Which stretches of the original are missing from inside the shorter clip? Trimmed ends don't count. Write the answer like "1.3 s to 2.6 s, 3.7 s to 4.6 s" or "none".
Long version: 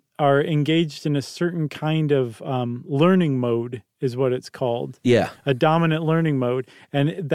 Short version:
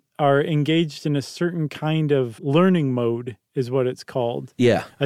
2.4 s to 2.8 s